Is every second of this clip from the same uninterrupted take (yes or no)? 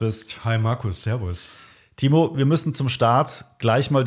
yes